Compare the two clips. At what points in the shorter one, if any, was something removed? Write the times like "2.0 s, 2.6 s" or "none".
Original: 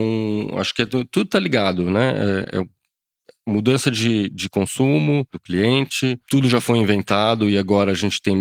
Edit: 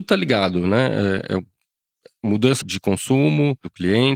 2.6 s